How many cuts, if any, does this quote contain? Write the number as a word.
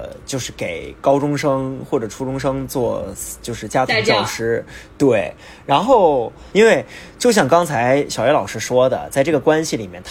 one